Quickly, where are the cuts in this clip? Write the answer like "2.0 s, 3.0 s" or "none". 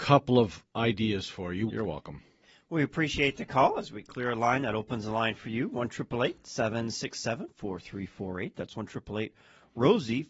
1.7 s